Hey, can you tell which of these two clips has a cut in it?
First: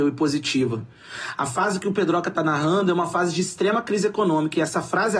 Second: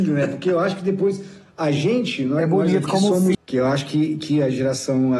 second; 1 cut; at 3.3 s

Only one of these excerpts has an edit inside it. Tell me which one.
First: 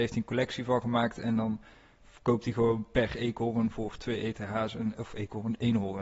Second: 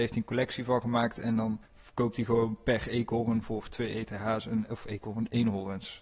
second; 1 cut; at 1.6 s

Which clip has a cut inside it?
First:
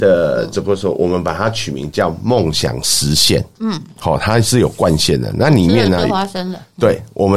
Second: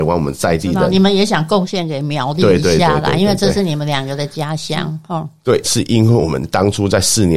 second; 1 cut; at 5.6 s

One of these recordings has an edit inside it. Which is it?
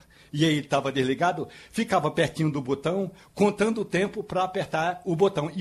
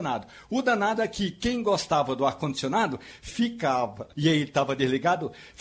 second; 1 cut; at 4.1 s

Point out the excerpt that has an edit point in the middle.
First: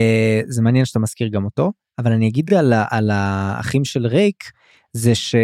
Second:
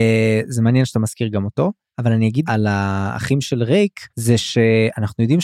second; 2 cuts; at 2.5 s, 4.1 s

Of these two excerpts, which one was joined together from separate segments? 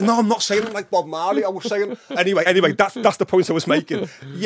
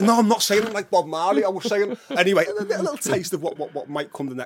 second; 2 cuts; at 2.5 s, 3.6 s

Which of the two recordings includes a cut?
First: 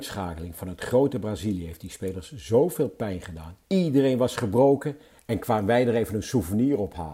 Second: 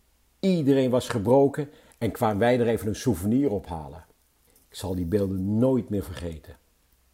first; 1 cut; at 3.6 s

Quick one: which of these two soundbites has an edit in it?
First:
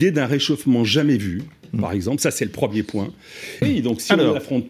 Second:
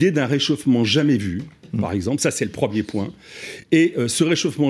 first; 1 cut; at 3.6 s

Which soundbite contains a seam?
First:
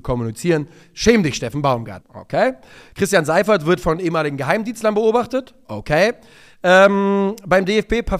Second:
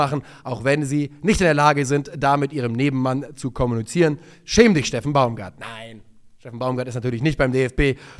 first; 1 cut; at 2.0 s

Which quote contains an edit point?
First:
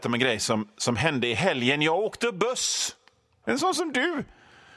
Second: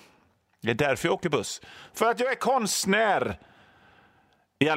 first; 1 cut; at 3.4 s

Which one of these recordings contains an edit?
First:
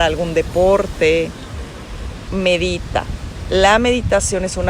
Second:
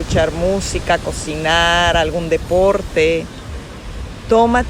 first; 1 cut; at 2.3 s

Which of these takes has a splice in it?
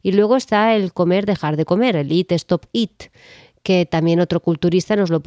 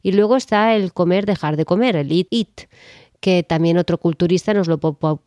second; 1 cut; at 2.3 s

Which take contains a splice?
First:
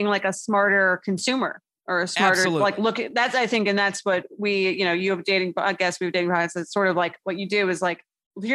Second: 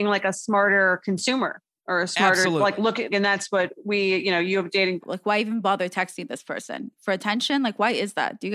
second; 2 cuts; at 3.1 s, 5.0 s

